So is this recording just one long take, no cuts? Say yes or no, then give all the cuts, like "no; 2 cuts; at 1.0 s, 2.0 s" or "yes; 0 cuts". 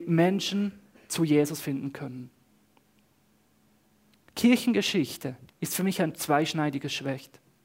no; 2 cuts; at 4.3 s, 5.5 s